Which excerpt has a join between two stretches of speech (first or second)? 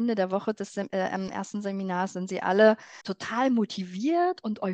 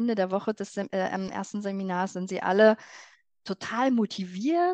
first